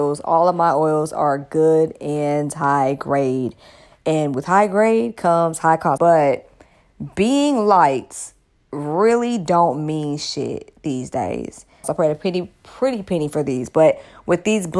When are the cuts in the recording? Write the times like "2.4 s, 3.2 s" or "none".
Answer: 6.0 s, 11.8 s